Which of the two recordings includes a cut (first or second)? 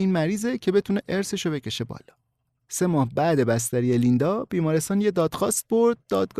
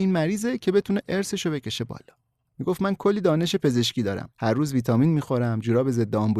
second